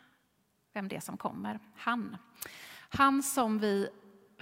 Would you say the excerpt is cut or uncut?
uncut